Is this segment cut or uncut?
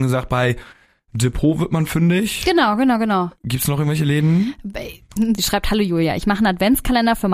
cut